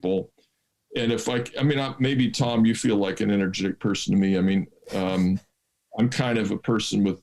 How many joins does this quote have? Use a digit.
0